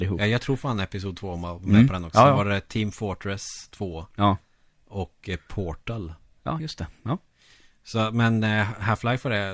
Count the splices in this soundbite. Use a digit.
0